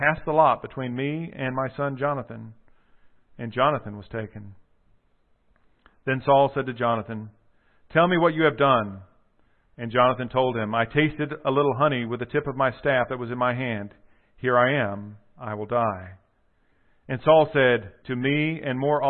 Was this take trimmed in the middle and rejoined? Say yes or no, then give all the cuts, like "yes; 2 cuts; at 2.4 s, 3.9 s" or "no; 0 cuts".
yes; 1 cut; at 18.0 s